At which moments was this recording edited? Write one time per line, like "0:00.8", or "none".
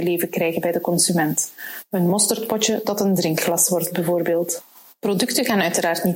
none